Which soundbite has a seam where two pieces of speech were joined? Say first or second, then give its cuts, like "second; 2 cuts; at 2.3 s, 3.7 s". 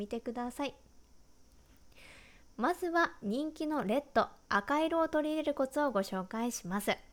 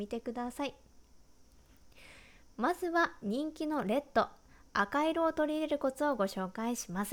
first; 1 cut; at 4.4 s